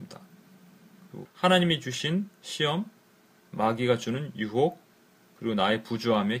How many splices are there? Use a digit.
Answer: 1